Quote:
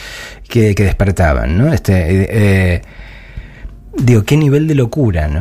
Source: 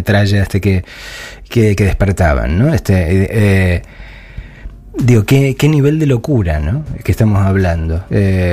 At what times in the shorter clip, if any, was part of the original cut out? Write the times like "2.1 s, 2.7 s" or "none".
4.2 s